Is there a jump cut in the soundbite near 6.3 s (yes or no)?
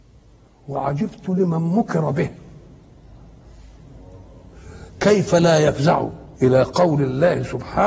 yes